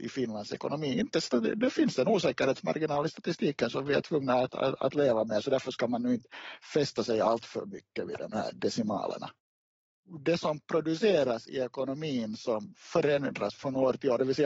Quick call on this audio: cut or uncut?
uncut